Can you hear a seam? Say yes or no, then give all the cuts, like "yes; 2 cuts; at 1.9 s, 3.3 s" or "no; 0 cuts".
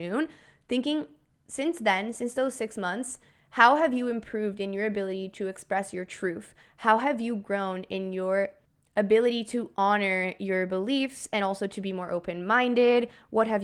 no; 0 cuts